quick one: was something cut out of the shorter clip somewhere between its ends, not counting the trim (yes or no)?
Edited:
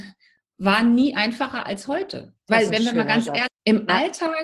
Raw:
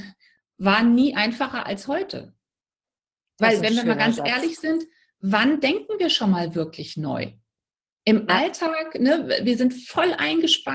yes